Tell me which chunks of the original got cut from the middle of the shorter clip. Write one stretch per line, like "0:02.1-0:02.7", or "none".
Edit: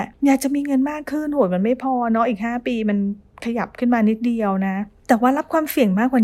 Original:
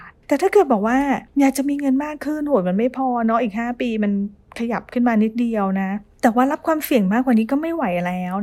none

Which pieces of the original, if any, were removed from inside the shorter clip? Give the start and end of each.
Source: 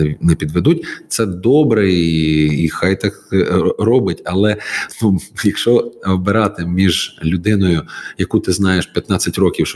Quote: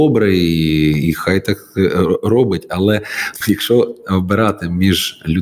0:05.0-0:05.4

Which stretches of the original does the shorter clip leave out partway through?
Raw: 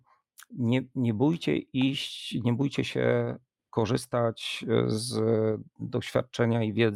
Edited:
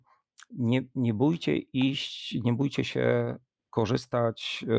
none

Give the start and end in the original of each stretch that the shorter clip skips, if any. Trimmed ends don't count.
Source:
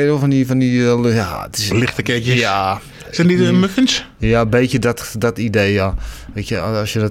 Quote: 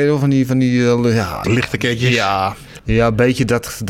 0:01.4-0:01.7
0:03.0-0:04.1

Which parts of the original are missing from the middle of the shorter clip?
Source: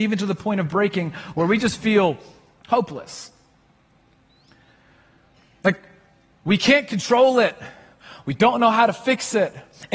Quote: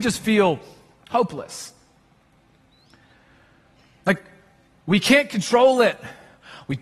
none

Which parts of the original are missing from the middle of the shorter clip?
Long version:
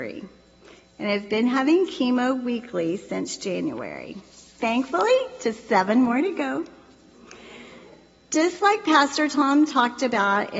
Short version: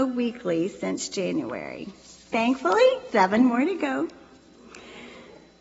0:05.4-0:05.7

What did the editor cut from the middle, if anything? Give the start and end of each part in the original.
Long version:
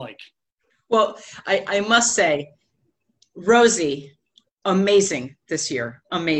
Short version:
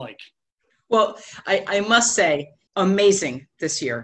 0:02.7-0:04.6

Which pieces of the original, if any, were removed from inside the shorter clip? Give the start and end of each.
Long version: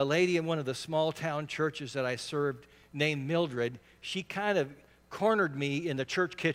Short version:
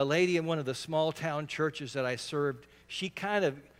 0:02.8-0:03.9

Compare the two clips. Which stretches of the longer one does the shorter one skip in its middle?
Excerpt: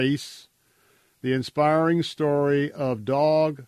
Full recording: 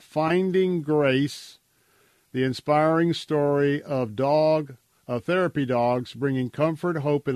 none

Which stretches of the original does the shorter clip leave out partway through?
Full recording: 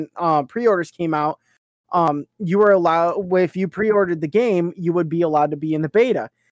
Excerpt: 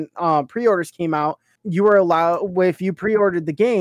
0:01.6-0:02.3

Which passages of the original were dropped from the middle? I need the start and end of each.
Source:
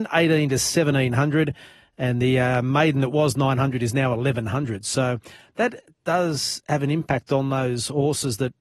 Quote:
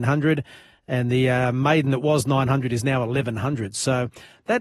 none

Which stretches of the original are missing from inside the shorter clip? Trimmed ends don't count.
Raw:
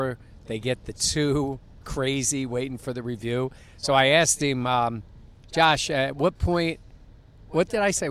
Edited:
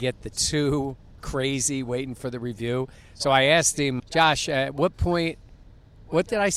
0:04.6-0:05.4

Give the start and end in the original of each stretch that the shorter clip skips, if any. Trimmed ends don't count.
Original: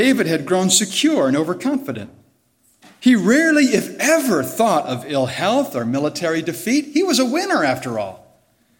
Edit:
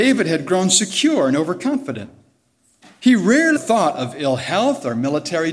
0:03.6-0:04.5

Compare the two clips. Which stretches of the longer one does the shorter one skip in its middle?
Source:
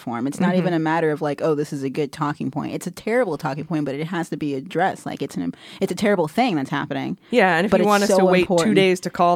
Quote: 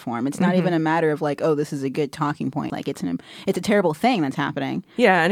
0:02.7-0:05.0

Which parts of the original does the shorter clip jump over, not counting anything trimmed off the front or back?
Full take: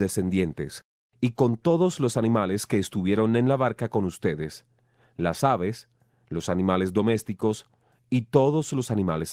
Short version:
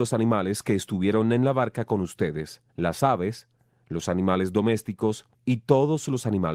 0:04.7-0:05.1
0:07.7-0:08.0

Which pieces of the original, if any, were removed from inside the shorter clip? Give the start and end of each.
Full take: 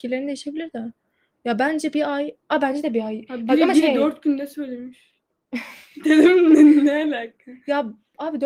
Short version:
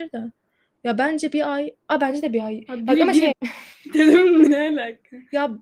0:03.9-0:05.4
0:06.6-0:06.8

